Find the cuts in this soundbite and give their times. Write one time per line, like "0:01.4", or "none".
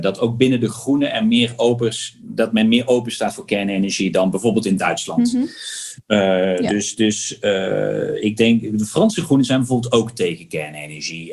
none